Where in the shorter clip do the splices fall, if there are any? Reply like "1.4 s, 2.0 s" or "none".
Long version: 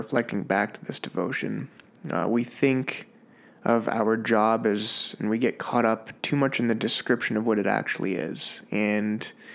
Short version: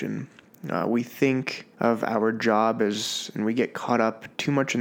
1.7 s